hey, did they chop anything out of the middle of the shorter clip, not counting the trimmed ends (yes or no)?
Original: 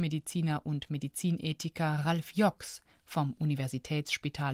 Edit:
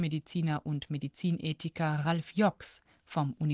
no